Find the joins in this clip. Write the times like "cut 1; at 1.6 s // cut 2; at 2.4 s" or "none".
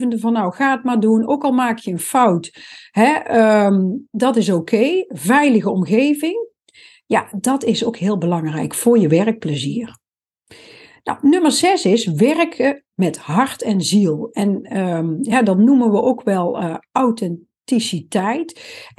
none